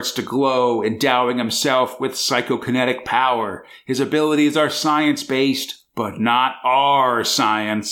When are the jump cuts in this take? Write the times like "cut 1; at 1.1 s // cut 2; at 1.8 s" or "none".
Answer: none